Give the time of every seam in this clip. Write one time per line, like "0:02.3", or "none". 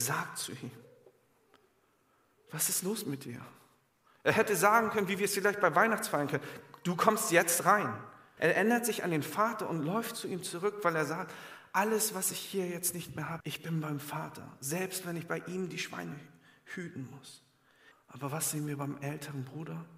0:08.4
0:13.4
0:17.9